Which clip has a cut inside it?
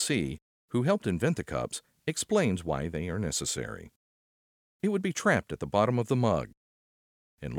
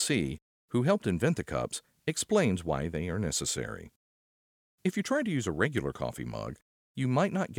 first; 1 cut; at 4.7 s

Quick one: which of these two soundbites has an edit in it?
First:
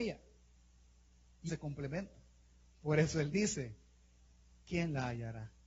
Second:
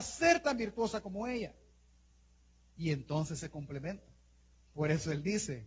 first; 1 cut; at 1.5 s

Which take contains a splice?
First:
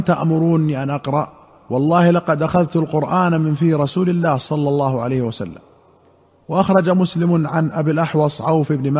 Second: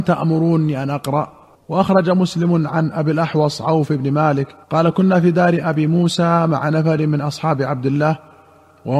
second; 2 cuts; at 1.5 s, 4.6 s

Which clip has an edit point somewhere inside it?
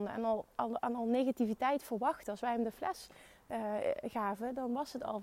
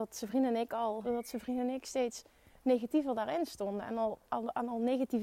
second; 1 cut; at 1.0 s

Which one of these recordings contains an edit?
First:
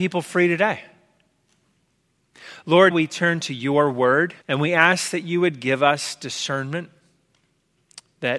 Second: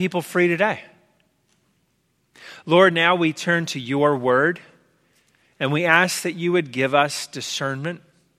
first; 2 cuts; at 2.9 s, 4.4 s

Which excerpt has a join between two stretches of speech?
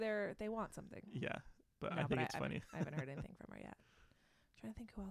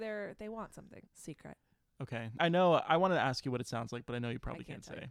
second; 2 cuts; at 1.1 s, 2.4 s

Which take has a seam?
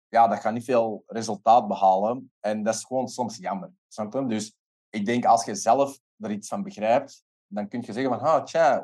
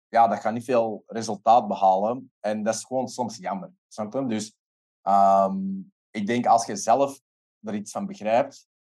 first; 2 cuts; at 4.8 s, 6.1 s

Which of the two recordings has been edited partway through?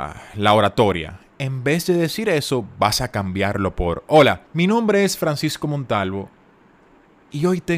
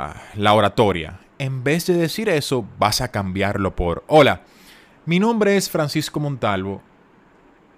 first; 1 cut; at 4.5 s

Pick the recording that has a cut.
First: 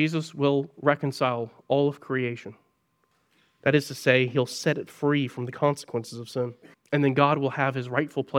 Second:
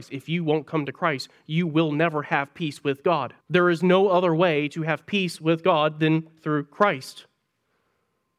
second; 1 cut; at 3.4 s

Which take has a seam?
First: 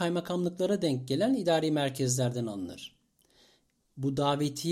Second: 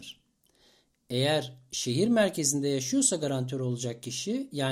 first; 1 cut; at 3.8 s

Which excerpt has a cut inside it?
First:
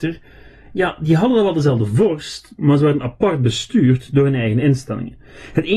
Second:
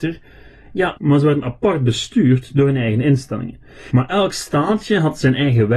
second; 2 cuts; at 1.0 s, 3.9 s

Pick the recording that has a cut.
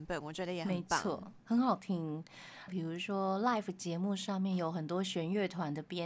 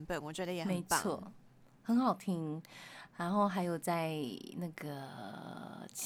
first; 2 cuts; at 1.4 s, 2.7 s

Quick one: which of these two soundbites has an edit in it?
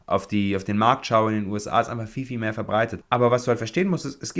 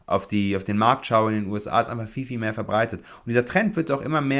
first; 1 cut; at 3.0 s

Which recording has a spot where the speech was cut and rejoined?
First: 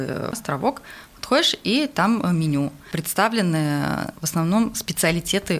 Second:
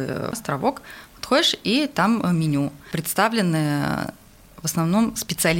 first; 1 cut; at 4.2 s

